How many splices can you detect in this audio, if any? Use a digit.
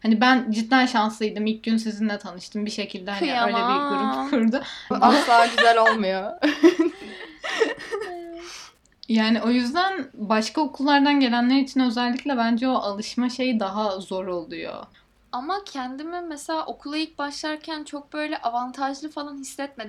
1